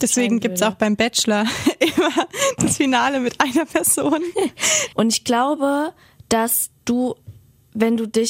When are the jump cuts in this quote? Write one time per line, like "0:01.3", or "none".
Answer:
0:04.9

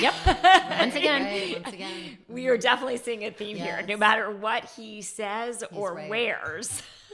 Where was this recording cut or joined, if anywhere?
none

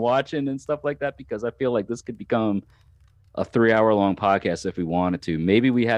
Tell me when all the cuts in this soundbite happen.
none

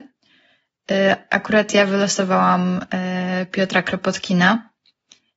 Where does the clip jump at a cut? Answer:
none

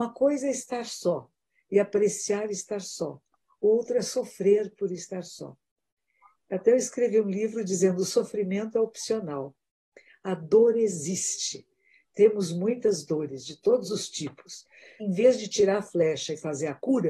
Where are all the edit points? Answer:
0:15.0

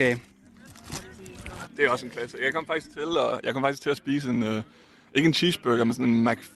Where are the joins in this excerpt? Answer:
0:01.7

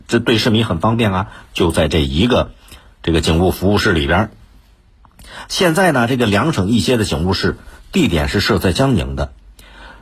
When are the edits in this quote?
0:01.5

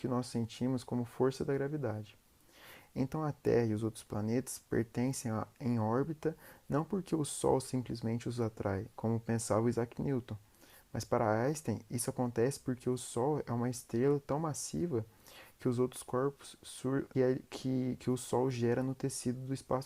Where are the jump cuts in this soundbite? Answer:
0:08.9
0:17.1

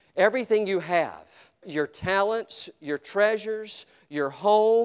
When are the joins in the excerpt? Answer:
0:01.6

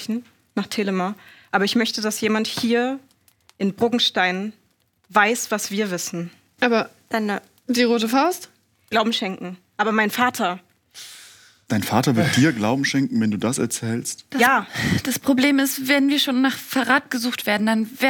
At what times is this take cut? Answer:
0:08.9

